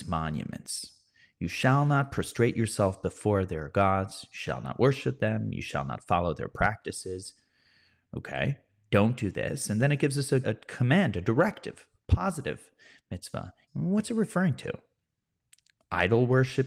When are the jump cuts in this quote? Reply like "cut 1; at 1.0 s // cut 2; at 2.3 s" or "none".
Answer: cut 1; at 10.4 s // cut 2; at 13.7 s